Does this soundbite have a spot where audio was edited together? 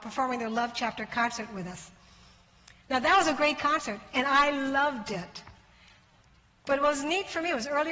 no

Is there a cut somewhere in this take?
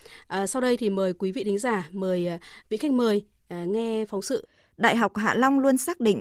no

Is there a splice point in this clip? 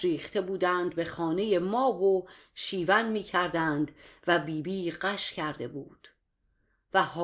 no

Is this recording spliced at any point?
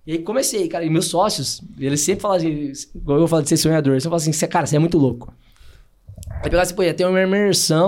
no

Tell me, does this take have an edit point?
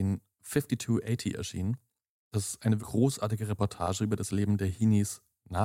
yes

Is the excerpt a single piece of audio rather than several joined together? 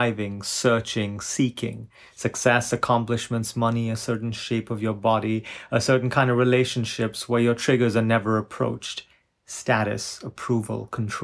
yes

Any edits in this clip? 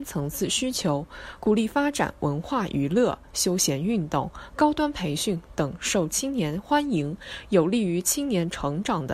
no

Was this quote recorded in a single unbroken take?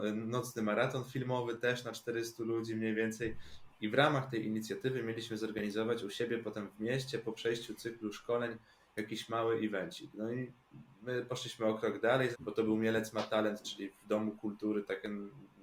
no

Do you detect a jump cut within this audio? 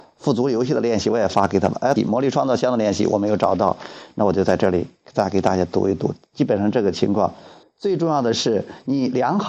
yes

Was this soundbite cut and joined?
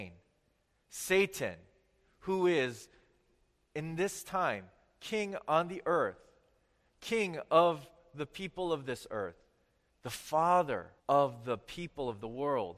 yes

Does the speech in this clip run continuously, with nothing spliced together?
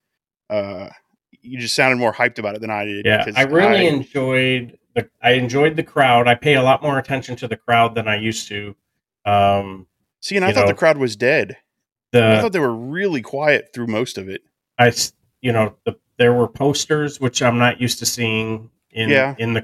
yes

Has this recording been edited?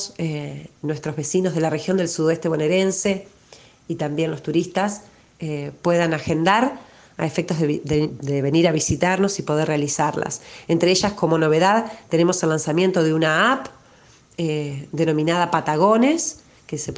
no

